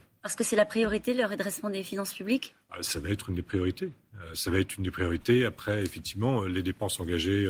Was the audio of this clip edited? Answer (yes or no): no